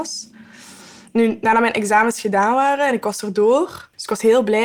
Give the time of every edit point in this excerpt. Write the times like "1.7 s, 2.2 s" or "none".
none